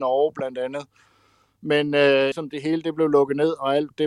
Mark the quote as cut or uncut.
cut